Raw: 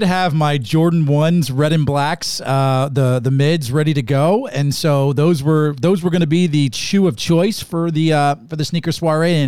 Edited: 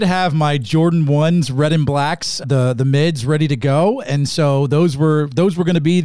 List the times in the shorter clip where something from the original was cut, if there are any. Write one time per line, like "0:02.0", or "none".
0:02.4

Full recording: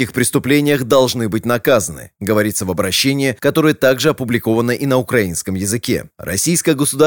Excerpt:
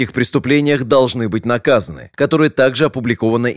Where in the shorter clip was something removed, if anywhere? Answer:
0:02.1

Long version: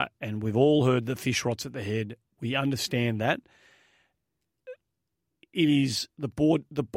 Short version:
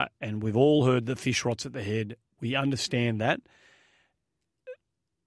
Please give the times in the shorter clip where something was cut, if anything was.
none

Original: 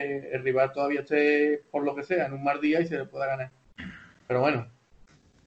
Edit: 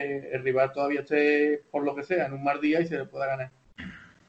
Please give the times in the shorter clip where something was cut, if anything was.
none

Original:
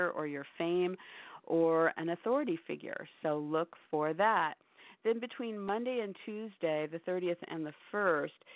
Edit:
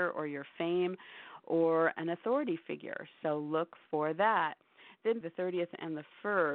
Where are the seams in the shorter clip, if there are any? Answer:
0:05.2

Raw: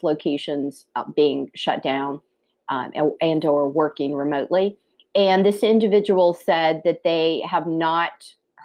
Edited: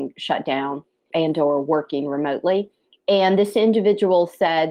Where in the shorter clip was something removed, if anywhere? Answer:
0:01.1

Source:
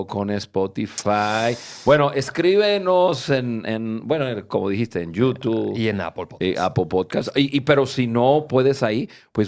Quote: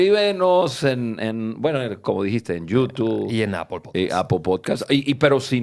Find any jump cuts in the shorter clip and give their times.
none

